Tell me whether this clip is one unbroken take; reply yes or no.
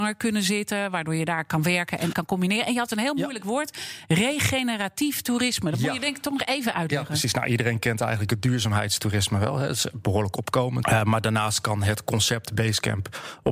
no